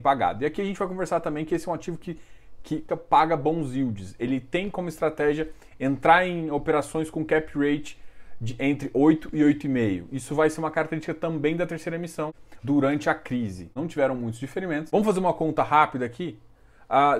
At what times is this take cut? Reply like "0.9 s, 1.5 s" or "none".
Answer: 2.9 s, 12.6 s